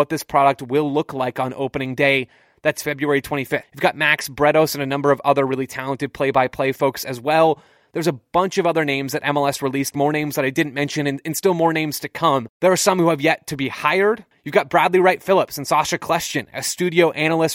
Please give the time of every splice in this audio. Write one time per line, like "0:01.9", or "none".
0:03.6
0:14.3